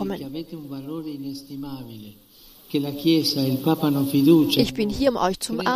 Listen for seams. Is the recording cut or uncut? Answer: uncut